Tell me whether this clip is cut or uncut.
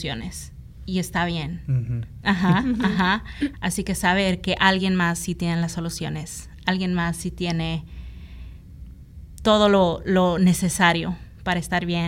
cut